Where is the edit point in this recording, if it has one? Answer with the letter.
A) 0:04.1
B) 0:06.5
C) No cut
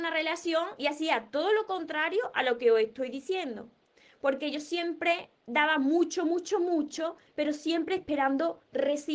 C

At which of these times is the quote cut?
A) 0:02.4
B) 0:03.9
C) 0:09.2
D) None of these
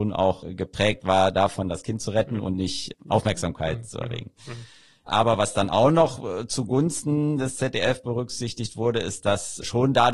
D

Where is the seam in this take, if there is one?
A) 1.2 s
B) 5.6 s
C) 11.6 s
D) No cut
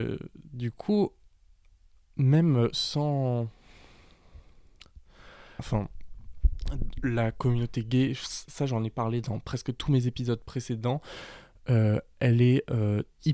B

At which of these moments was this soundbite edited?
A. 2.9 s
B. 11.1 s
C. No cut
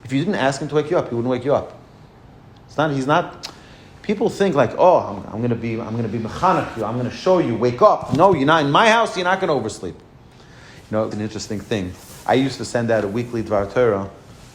B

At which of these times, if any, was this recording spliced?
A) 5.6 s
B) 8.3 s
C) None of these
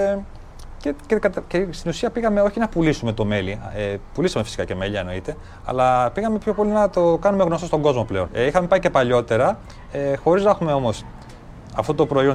B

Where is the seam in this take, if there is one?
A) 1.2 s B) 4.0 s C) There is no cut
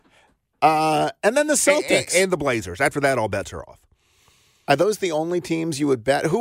C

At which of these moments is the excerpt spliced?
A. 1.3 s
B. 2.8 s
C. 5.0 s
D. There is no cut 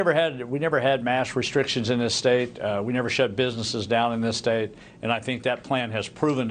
D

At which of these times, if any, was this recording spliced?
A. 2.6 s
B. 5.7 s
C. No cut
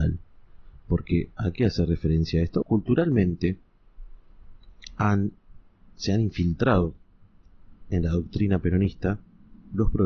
A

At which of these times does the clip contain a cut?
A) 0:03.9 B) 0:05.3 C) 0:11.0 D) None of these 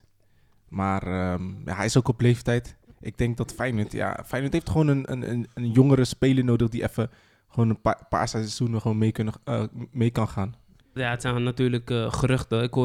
C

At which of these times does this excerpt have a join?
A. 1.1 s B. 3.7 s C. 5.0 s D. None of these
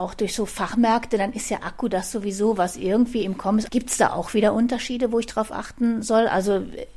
B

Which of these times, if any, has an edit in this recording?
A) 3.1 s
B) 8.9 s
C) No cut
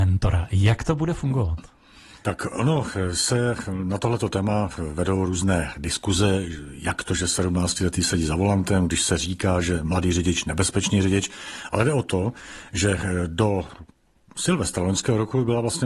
C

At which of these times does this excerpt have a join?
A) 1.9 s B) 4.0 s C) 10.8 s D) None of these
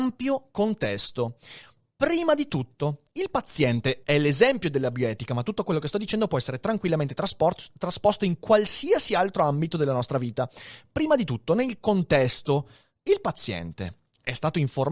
B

